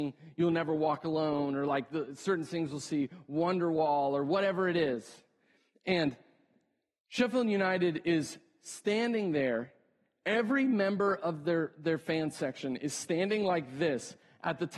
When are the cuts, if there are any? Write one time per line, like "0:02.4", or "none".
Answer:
none